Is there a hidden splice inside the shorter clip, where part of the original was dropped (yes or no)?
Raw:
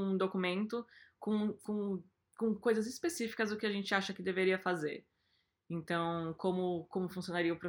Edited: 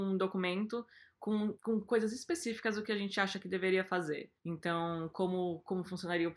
yes